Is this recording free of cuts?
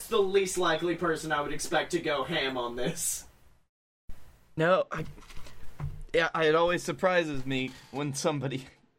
yes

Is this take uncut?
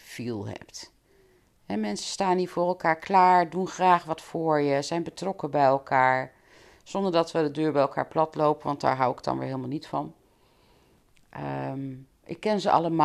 yes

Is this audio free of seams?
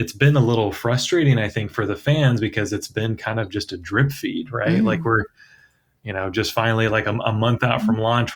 yes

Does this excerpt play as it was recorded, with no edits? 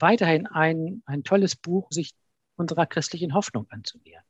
no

